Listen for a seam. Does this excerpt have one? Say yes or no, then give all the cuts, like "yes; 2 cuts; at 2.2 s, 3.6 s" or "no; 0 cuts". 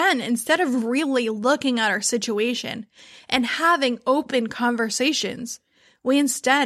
no; 0 cuts